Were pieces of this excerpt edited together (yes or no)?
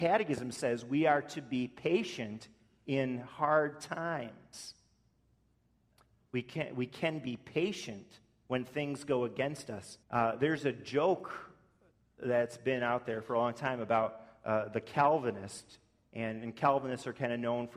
yes